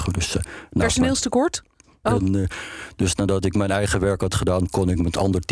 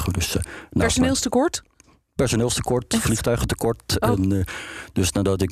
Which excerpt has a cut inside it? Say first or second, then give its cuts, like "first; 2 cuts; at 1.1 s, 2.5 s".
first; 1 cut; at 2.0 s